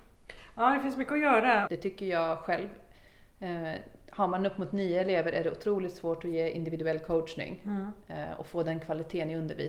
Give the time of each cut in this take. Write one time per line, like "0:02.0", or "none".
0:01.7